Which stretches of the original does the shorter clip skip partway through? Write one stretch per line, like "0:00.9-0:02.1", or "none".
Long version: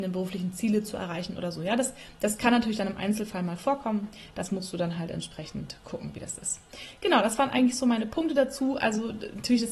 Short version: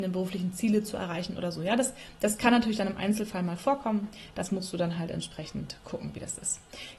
none